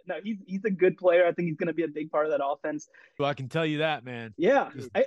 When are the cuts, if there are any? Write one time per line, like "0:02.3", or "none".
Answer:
0:03.2